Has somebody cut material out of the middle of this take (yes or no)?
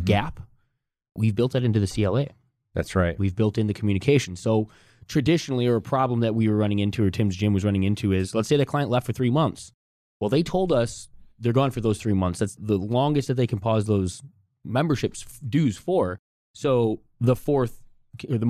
no